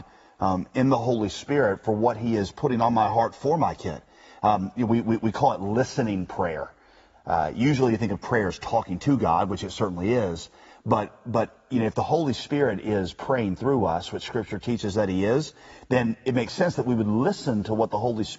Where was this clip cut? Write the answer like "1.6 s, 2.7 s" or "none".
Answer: none